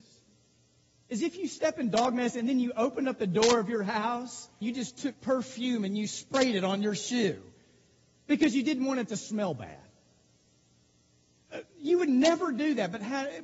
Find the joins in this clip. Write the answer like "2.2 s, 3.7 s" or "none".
4.6 s